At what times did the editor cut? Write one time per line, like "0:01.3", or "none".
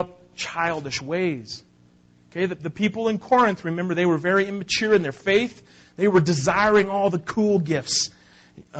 none